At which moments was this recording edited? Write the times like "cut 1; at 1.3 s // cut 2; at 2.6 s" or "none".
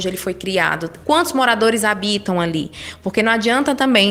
cut 1; at 1.0 s

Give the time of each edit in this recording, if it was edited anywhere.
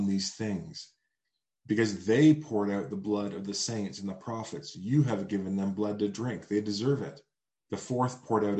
cut 1; at 7.6 s

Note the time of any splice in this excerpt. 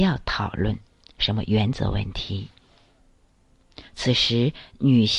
cut 1; at 3.9 s

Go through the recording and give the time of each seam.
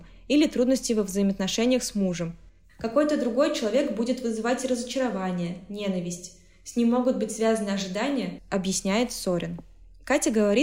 cut 1; at 8.4 s

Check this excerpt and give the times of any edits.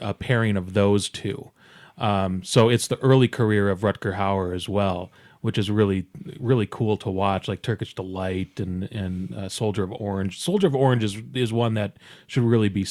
none

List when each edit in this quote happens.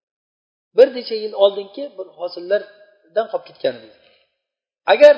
none

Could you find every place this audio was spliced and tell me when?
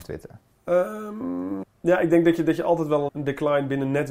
cut 1; at 1.6 s // cut 2; at 3.1 s

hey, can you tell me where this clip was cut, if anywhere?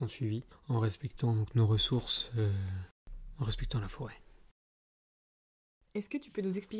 none

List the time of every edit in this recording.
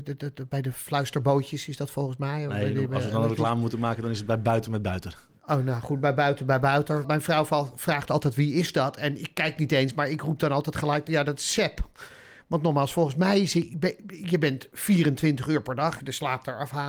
cut 1; at 7.0 s // cut 2; at 16.0 s

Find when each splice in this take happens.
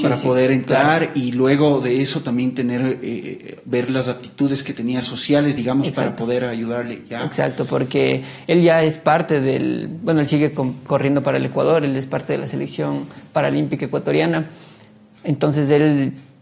none

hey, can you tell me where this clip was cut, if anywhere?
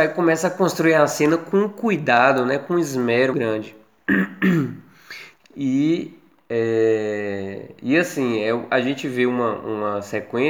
cut 1; at 3.3 s // cut 2; at 5.4 s

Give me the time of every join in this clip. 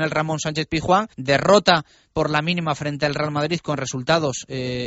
cut 1; at 1.1 s

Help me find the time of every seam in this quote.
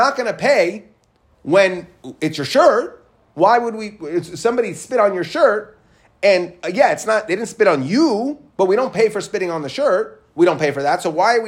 cut 1; at 8.5 s

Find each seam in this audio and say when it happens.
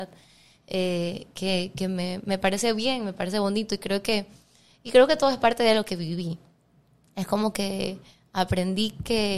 none

